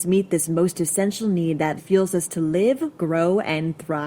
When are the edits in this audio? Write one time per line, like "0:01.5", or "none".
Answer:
0:01.8
0:03.0